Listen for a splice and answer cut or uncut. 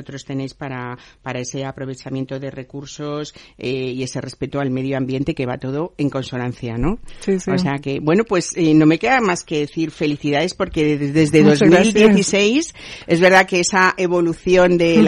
uncut